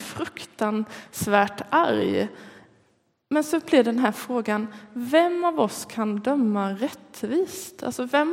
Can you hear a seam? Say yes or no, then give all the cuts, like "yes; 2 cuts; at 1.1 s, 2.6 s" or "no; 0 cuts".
no; 0 cuts